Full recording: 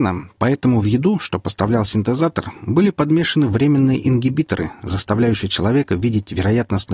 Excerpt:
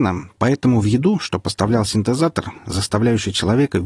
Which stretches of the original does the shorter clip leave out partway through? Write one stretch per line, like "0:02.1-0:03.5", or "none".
0:02.6-0:04.7